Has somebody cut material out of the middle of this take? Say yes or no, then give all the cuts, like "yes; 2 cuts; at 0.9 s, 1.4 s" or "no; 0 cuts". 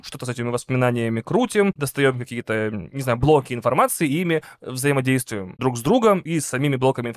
no; 0 cuts